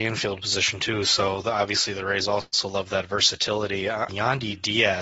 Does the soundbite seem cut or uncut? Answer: cut